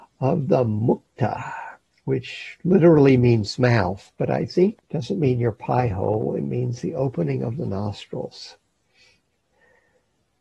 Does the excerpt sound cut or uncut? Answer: uncut